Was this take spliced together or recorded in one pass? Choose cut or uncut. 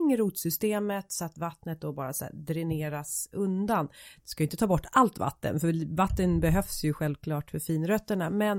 uncut